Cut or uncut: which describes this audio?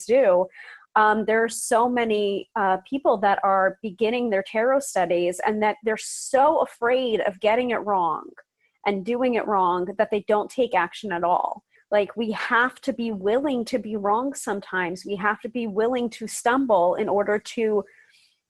cut